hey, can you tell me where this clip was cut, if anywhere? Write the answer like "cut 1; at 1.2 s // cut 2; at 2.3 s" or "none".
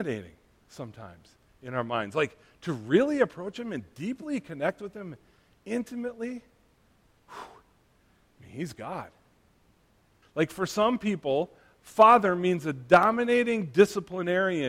cut 1; at 10.2 s